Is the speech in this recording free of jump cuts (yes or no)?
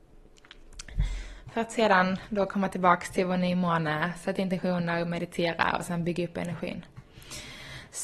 yes